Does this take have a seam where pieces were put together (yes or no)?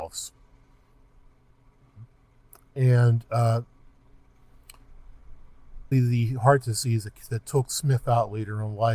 yes